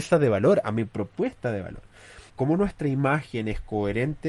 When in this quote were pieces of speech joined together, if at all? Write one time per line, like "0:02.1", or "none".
0:02.3